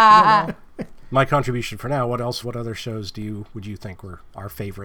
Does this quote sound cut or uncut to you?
cut